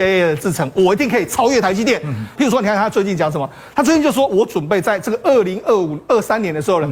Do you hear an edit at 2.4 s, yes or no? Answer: yes